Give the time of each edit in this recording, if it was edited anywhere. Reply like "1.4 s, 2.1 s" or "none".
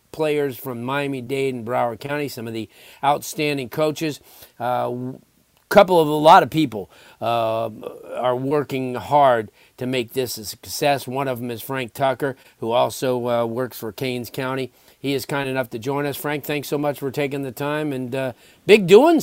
none